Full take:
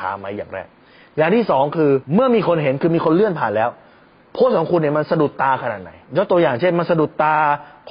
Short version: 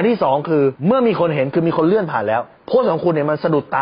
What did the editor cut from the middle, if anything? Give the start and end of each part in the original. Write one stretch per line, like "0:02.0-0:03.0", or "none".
0:03.8-0:04.2